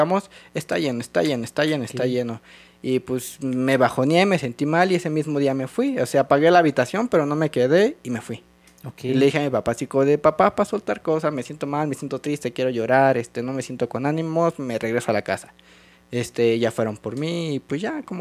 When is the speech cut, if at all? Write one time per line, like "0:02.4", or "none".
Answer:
none